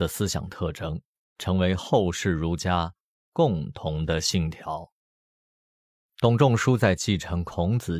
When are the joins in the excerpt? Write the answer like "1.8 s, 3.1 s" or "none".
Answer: none